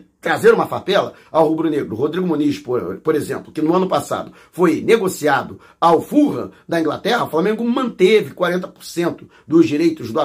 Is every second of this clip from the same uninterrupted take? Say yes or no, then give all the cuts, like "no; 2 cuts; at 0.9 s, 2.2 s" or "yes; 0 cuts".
yes; 0 cuts